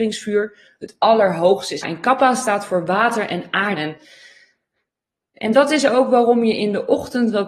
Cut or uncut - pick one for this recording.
cut